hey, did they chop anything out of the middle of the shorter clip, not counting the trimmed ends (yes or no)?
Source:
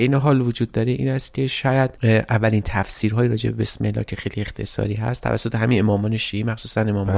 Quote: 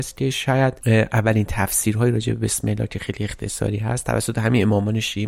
no